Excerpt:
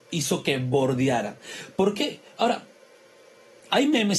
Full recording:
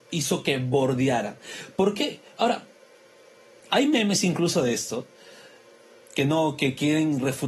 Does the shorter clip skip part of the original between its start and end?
no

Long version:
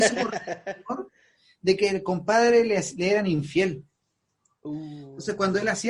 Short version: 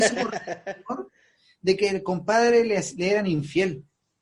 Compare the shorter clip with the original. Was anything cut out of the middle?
no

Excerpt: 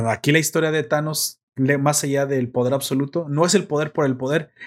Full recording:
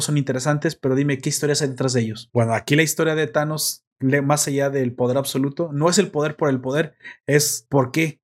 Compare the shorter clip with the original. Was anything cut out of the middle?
no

